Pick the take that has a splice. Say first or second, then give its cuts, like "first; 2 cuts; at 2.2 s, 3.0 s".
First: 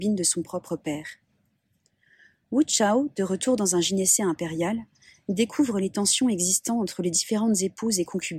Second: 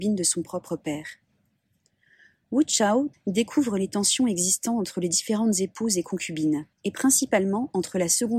second; 2 cuts; at 3.1 s, 6.7 s